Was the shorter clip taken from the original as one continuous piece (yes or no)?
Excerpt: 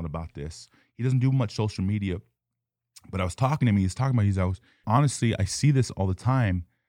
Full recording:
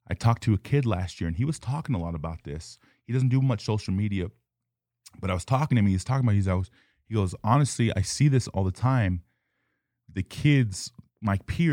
no